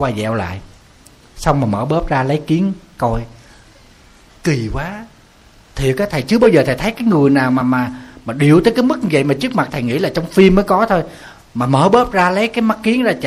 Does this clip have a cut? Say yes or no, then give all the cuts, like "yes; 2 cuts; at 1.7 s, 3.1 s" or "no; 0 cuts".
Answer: yes; 2 cuts; at 7.6 s, 9.7 s